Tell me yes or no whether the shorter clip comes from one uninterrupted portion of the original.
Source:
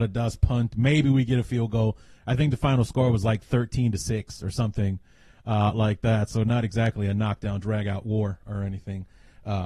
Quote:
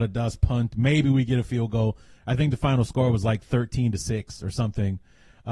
yes